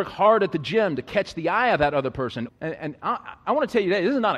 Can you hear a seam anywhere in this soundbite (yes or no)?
yes